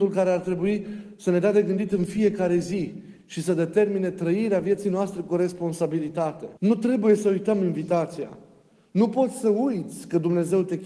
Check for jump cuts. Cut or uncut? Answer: cut